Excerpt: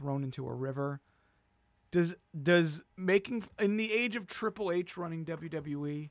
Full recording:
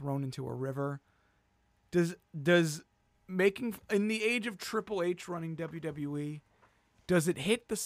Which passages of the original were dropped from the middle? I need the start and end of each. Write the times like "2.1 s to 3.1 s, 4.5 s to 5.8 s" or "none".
2.9 s to 3.2 s